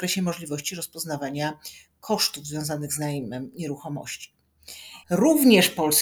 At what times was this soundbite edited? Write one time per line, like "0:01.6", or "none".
0:05.0